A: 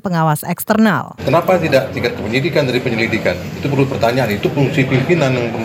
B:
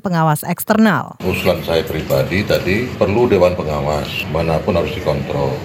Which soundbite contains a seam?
A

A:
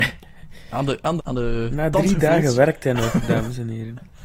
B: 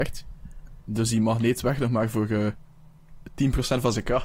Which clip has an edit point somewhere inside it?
A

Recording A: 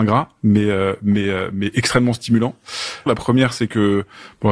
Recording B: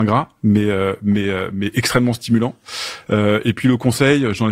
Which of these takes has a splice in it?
A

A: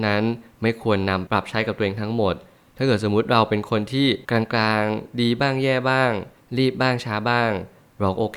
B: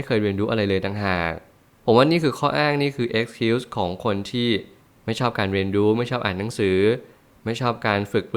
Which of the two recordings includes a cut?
A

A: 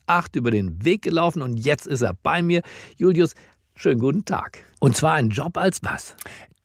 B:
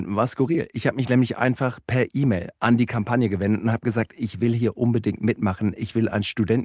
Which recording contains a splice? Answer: A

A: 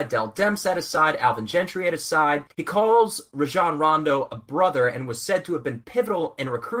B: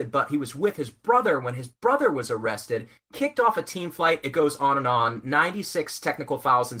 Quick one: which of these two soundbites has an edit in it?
A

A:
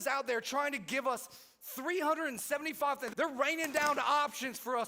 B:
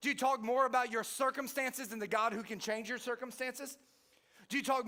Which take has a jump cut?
A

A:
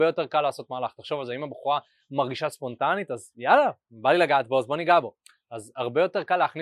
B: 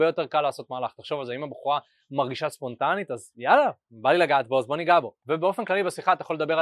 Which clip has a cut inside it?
B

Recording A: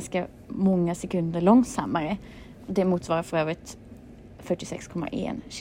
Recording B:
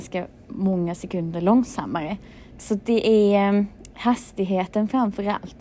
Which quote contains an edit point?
B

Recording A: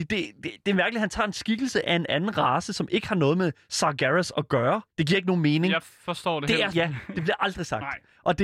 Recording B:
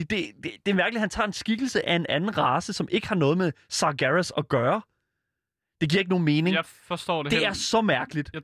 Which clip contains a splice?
A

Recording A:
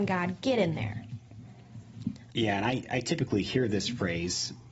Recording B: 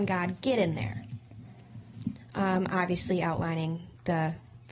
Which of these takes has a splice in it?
A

